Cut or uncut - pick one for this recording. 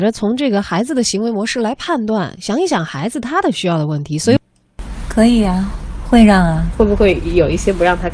cut